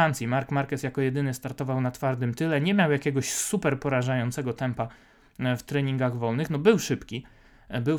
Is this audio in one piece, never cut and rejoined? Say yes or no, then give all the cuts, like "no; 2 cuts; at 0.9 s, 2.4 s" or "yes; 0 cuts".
yes; 0 cuts